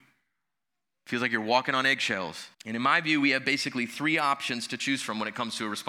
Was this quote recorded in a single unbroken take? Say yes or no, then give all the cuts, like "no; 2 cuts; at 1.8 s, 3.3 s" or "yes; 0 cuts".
no; 1 cut; at 2.5 s